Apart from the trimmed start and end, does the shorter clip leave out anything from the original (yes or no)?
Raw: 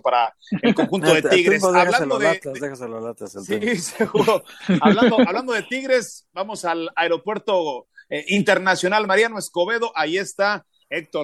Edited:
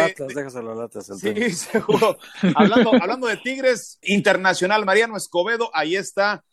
yes